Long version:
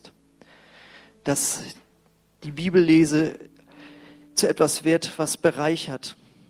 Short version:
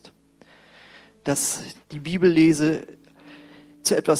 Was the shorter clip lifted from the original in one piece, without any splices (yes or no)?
no